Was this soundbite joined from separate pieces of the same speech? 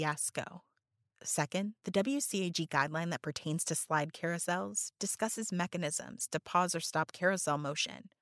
yes; 1 cut; at 1.1 s

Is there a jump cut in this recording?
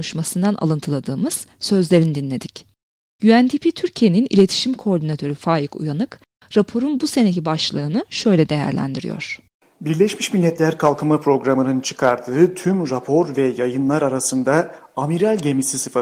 no; 0 cuts

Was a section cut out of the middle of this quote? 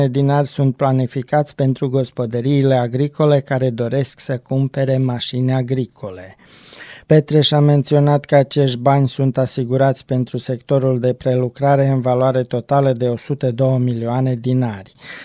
yes; 1 cut; at 7.0 s

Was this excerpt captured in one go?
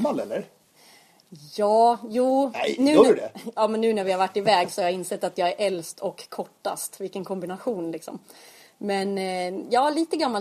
yes; 0 cuts

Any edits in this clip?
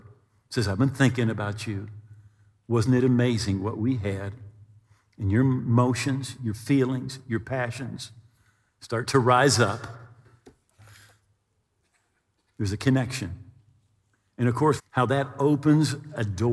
yes; 1 cut; at 14.8 s

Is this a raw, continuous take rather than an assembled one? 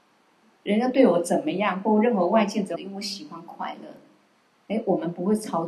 no; 1 cut; at 2.7 s

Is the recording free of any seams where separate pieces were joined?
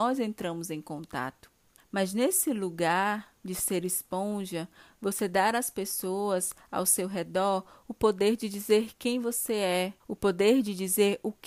no; 2 cuts; at 1.8 s, 10.0 s

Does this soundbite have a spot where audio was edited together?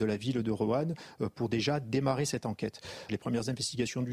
yes; 1 cut; at 3.1 s

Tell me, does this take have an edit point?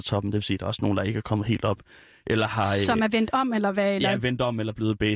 no; 0 cuts

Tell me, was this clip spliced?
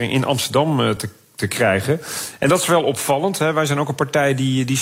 no; 0 cuts

